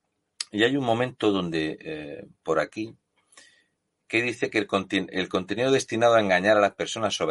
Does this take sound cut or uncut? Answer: uncut